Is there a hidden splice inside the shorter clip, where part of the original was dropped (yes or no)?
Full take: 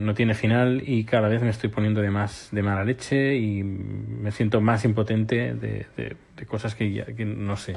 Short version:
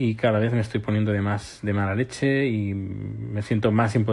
no